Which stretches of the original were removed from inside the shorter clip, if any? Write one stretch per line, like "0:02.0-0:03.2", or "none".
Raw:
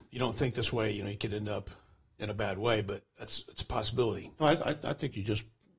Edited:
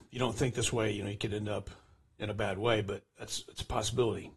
none